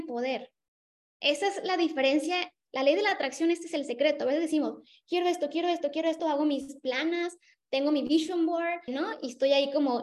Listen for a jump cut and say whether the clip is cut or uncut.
cut